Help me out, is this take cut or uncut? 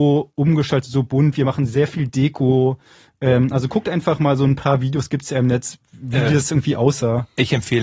uncut